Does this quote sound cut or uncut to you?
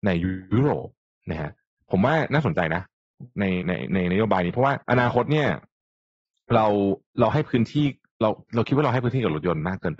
cut